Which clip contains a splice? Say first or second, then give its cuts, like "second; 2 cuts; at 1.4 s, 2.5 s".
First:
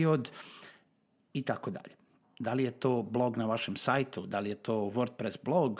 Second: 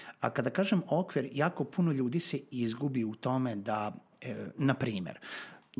first; 1 cut; at 2.2 s